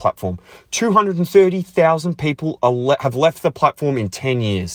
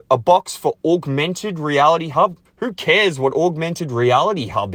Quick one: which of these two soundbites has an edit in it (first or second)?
second